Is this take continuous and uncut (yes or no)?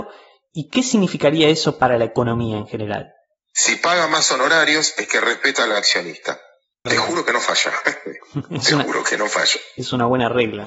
no